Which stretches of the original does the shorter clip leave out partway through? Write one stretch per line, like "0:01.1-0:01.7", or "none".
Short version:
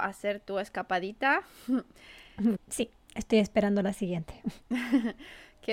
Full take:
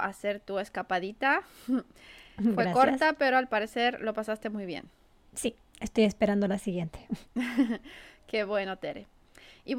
0:02.6-0:05.2